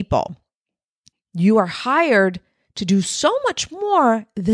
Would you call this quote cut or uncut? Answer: cut